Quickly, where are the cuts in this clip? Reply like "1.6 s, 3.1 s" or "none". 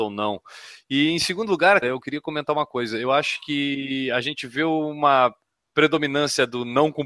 1.8 s